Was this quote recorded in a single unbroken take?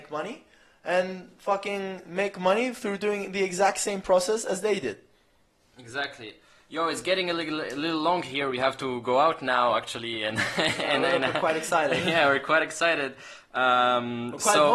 yes; 0 cuts

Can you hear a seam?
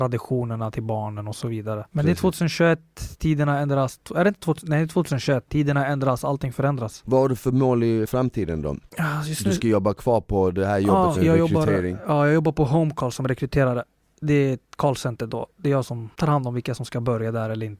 yes; 2 cuts; at 7.0 s, 11.1 s

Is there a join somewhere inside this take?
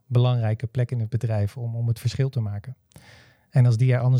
no; 0 cuts

